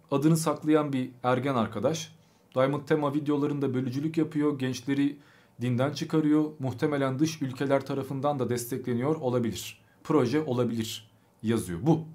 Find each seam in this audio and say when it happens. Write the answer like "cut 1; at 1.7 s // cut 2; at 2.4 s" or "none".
none